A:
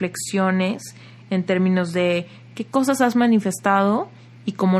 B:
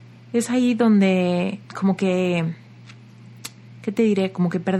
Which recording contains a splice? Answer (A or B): B